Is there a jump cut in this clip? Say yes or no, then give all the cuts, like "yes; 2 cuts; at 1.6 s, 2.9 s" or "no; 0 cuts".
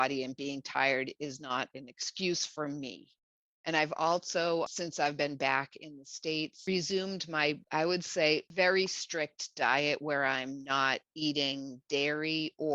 no; 0 cuts